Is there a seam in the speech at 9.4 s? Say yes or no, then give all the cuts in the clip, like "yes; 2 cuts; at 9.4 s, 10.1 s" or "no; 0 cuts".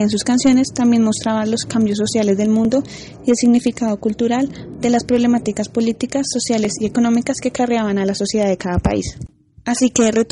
no; 0 cuts